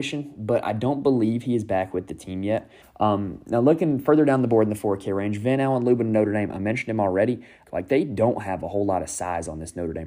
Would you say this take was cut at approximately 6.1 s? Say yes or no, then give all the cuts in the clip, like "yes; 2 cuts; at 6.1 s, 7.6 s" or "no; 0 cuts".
no; 2 cuts; at 2.8 s, 7.6 s